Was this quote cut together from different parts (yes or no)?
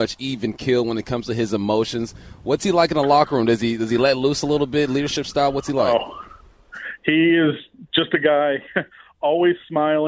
no